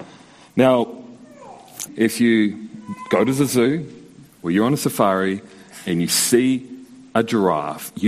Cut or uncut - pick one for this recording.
cut